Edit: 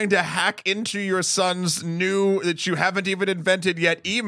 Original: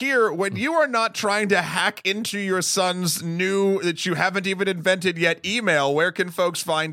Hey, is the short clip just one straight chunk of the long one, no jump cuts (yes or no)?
yes